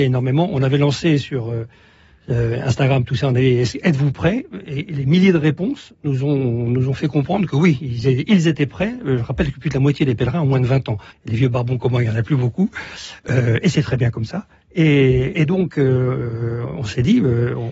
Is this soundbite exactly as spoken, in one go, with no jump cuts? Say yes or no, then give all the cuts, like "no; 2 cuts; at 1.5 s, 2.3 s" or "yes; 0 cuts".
no; 1 cut; at 11.1 s